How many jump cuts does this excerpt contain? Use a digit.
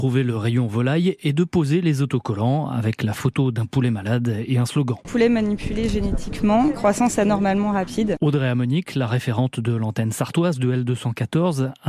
1